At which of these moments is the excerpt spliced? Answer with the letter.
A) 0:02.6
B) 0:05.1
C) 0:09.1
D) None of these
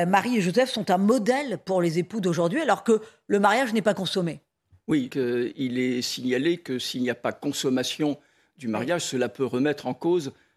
B